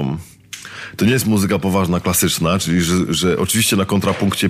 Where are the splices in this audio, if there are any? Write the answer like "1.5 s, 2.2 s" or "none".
none